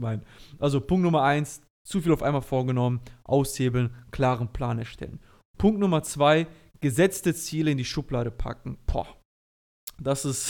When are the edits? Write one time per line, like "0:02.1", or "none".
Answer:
none